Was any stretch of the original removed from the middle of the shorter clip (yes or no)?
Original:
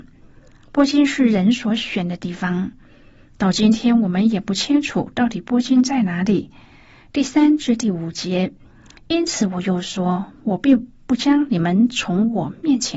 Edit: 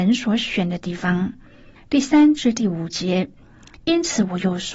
yes